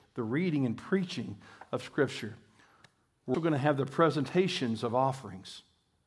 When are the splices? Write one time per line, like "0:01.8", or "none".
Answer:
0:03.3